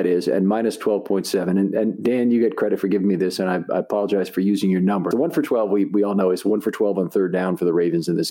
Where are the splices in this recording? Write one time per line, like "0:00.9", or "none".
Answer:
0:05.1

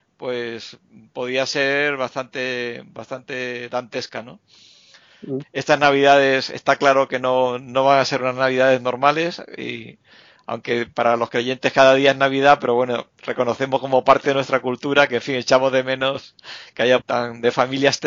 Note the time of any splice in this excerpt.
0:05.4
0:17.0

